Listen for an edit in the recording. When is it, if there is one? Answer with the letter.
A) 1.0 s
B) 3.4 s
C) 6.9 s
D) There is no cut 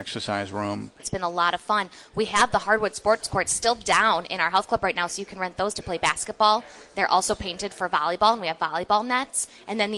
A